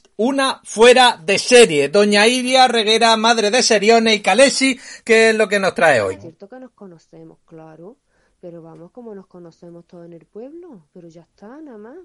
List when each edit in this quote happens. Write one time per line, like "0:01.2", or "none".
0:05.0
0:06.2